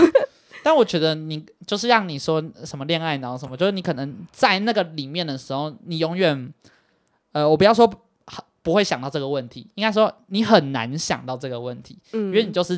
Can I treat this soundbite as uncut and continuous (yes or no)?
yes